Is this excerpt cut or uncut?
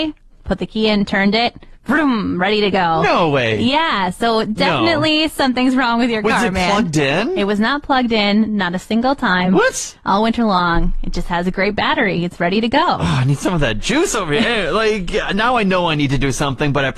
uncut